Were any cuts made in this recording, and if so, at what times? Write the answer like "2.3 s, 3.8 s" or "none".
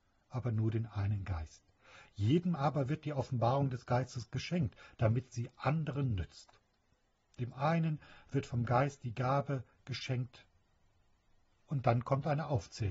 none